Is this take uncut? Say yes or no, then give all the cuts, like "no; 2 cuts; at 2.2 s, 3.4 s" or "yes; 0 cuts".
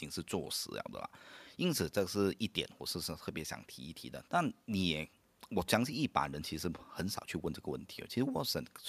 no; 1 cut; at 4.3 s